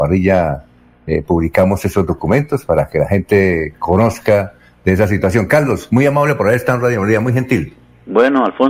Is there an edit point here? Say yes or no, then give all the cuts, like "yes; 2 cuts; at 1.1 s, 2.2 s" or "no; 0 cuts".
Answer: no; 0 cuts